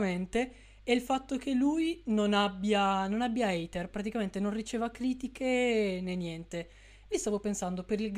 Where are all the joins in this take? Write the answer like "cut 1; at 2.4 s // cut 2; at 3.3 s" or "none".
cut 1; at 7.1 s